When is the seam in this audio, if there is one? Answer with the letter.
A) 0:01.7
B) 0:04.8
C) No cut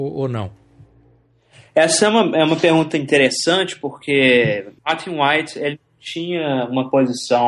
B